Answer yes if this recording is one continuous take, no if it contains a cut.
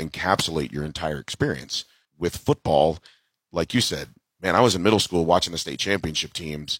yes